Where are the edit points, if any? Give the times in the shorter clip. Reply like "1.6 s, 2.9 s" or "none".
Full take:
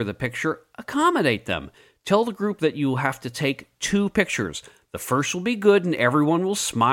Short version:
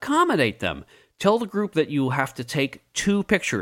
none